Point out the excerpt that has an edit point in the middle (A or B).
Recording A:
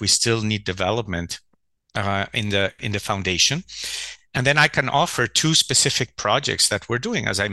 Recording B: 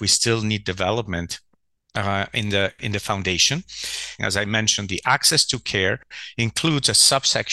B